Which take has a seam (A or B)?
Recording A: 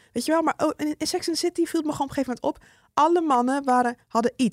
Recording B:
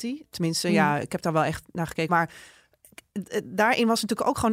B